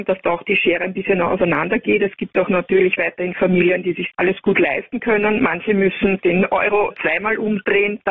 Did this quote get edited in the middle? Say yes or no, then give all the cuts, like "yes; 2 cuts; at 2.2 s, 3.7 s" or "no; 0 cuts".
yes; 1 cut; at 6.2 s